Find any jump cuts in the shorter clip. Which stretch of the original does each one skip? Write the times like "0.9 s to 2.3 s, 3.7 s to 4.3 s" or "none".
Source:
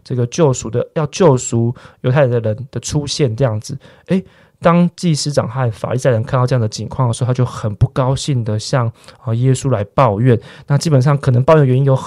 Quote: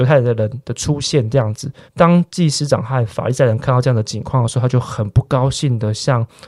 3.9 s to 4.5 s